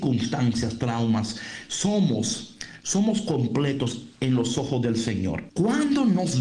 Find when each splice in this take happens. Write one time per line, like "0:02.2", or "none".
0:05.5